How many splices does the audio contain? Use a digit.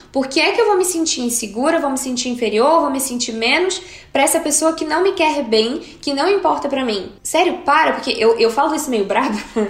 0